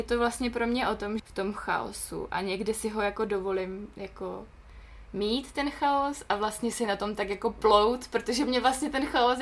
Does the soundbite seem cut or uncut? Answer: cut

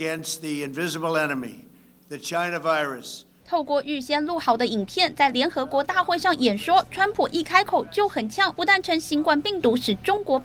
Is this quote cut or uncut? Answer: cut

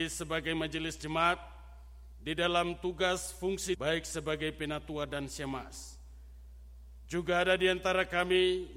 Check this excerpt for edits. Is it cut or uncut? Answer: cut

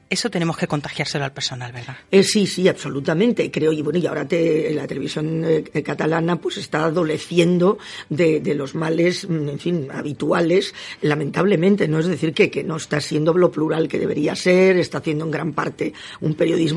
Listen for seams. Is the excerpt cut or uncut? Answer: uncut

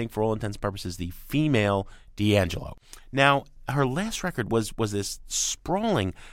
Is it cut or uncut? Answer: uncut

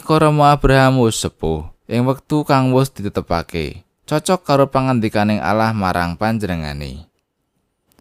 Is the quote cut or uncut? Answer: cut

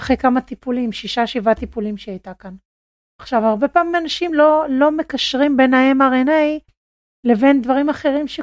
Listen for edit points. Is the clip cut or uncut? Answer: uncut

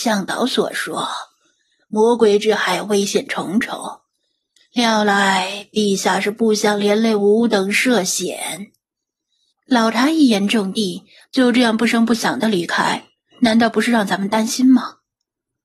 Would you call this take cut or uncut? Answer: cut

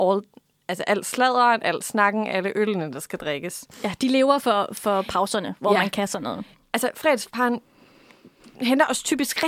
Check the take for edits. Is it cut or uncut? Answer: uncut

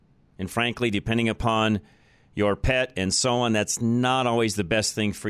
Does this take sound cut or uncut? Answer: uncut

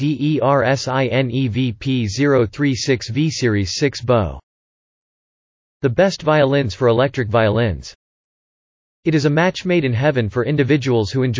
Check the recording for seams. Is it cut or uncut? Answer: uncut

